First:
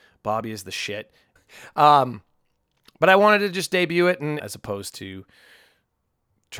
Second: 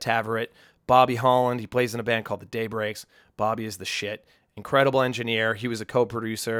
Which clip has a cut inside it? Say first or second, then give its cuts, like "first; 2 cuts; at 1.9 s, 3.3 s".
first; 2 cuts; at 1.4 s, 4.4 s